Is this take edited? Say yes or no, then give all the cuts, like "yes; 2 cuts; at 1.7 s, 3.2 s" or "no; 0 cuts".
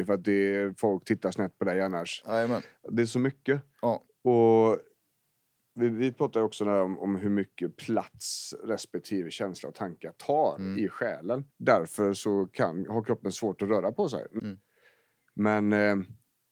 yes; 2 cuts; at 11.5 s, 14.4 s